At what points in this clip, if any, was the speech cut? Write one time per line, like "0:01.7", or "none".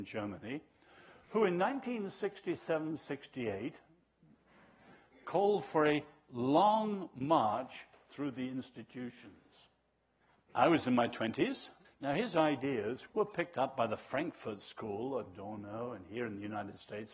0:10.3
0:11.8
0:13.1